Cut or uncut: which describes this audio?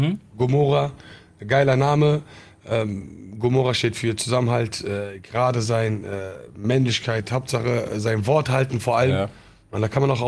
uncut